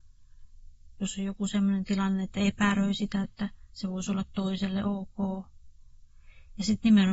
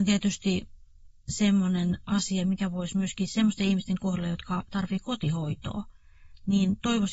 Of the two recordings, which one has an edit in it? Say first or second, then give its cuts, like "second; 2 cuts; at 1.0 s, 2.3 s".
first; 2 cuts; at 0.9 s, 3.2 s